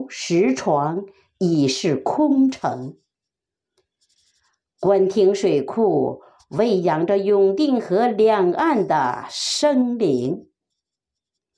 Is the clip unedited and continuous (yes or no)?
yes